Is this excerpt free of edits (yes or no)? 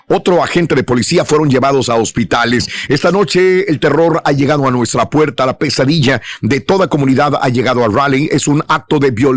no